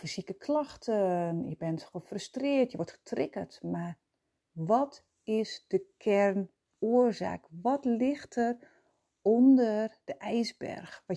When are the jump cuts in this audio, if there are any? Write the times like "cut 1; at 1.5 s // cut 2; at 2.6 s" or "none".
none